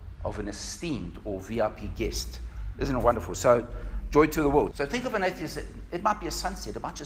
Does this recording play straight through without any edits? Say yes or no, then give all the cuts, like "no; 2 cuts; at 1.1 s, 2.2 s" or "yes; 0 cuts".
no; 1 cut; at 4.7 s